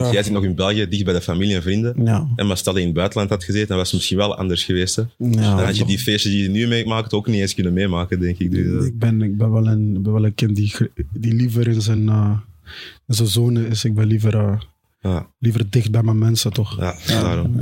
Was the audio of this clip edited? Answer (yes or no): no